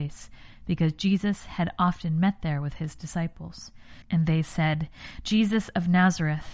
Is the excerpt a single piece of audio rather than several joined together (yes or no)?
no